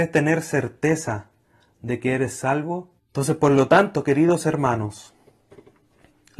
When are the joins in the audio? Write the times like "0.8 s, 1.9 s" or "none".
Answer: 3.0 s